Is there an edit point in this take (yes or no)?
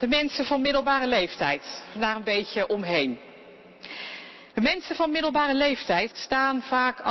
yes